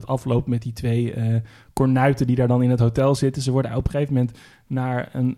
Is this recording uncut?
yes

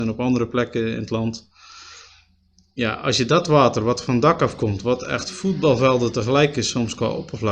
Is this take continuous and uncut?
yes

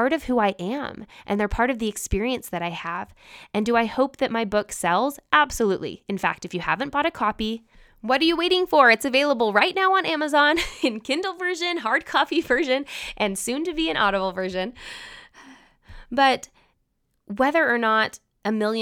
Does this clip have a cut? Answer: no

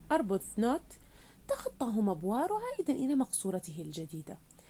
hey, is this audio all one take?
yes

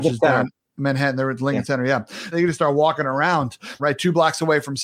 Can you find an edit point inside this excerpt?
yes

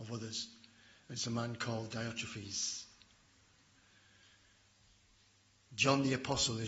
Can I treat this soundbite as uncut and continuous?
yes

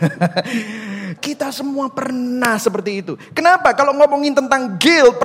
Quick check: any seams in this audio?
yes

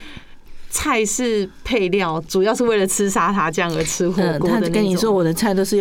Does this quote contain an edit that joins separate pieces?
yes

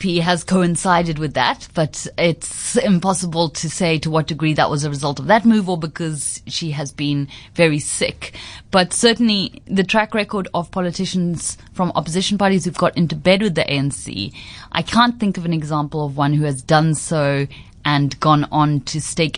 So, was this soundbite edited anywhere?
no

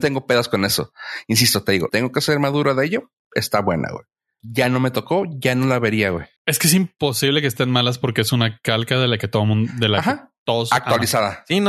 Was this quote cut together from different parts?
yes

